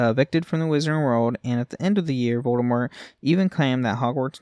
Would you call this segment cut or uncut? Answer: uncut